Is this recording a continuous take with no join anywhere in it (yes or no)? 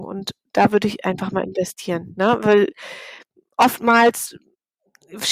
yes